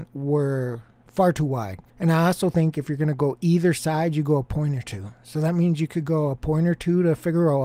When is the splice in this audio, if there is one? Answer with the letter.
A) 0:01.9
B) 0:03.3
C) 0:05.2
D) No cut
A